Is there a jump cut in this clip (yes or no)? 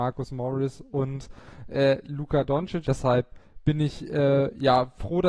yes